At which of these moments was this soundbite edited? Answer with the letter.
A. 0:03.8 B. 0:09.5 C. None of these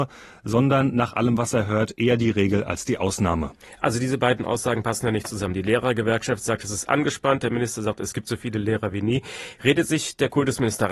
C